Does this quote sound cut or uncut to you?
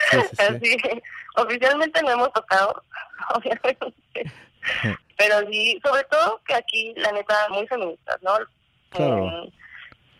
cut